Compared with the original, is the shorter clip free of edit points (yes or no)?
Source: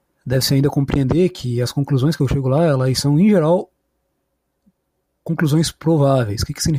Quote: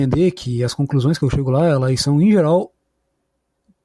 yes